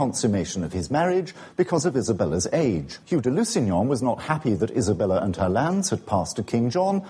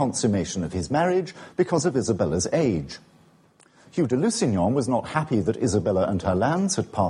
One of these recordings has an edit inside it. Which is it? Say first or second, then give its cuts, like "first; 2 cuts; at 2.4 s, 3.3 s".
first; 1 cut; at 3.0 s